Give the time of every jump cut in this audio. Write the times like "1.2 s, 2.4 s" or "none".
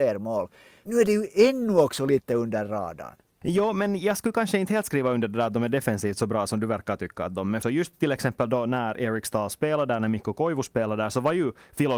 7.6 s

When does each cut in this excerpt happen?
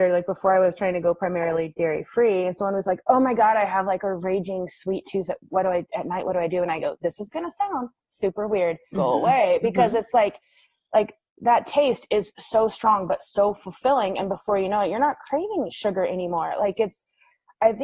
8.9 s

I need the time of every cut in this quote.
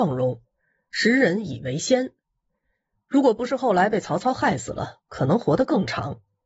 none

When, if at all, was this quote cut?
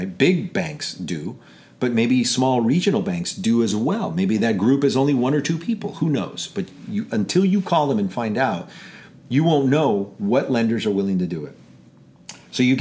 none

